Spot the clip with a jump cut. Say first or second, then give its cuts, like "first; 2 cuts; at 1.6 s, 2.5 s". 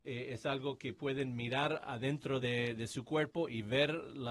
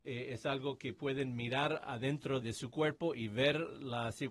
second; 1 cut; at 2.4 s